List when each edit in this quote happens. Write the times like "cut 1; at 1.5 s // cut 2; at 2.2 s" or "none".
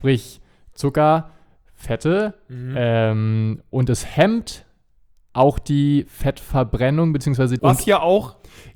cut 1; at 7.6 s